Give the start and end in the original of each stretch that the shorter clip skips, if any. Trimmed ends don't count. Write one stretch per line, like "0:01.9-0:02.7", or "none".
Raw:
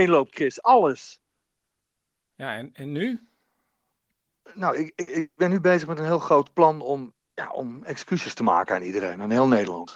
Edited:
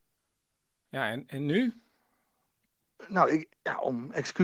0:05.0-0:07.2